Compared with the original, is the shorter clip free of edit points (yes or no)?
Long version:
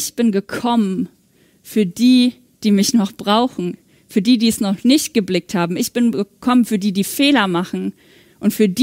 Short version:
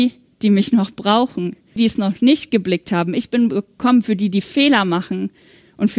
no